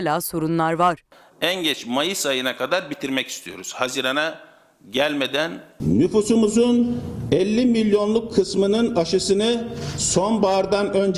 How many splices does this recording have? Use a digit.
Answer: 0